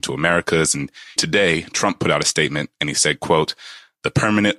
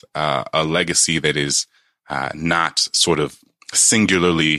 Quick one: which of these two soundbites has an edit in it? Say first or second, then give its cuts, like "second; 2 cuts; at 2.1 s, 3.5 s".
first; 1 cut; at 1.2 s